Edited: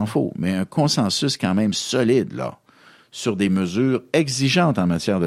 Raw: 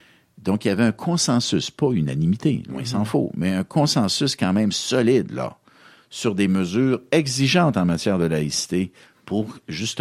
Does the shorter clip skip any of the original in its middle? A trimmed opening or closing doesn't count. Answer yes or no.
no